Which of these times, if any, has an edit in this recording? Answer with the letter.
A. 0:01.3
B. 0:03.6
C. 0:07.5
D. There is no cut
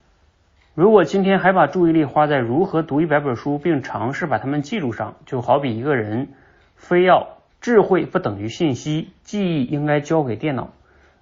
C